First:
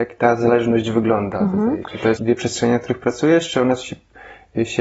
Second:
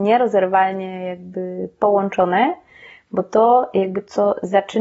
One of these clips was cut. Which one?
first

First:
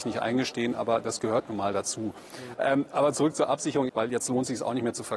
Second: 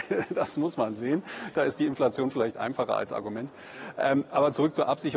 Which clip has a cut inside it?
first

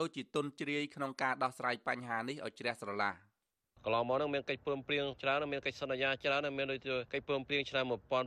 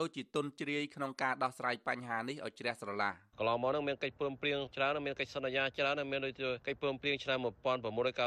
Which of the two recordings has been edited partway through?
second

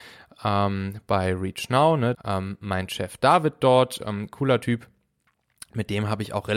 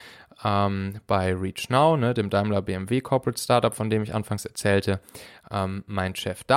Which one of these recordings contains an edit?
first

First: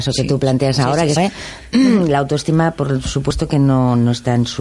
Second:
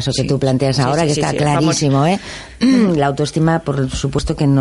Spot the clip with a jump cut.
first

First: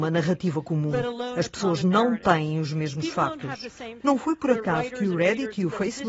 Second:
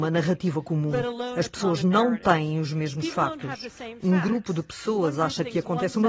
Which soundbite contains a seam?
first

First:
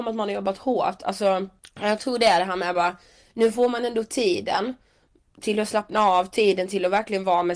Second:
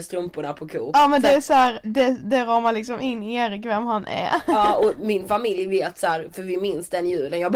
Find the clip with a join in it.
second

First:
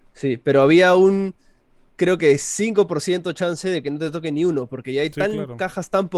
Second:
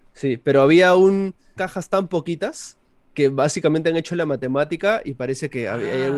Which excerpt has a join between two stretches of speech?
second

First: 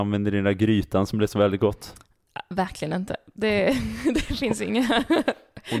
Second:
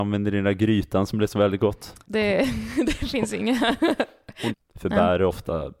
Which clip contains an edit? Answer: second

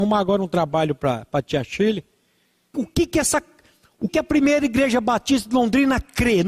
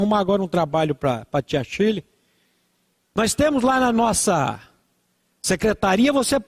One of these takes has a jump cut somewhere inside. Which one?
first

